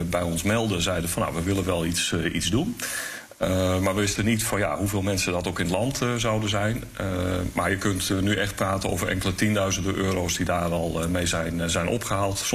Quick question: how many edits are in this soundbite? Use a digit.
0